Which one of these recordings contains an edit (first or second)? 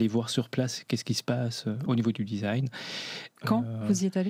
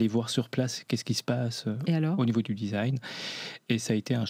first